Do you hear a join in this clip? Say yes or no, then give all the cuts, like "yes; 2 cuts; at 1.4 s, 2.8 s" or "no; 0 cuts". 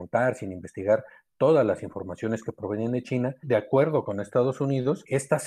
no; 0 cuts